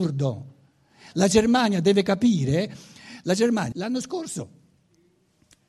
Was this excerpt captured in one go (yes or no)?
no